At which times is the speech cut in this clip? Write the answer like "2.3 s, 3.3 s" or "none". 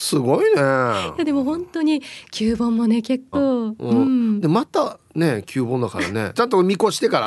3.3 s, 6.3 s